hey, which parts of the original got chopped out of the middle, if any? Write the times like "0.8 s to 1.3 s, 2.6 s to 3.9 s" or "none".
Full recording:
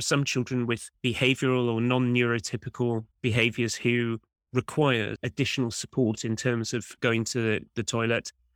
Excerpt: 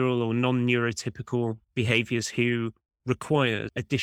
none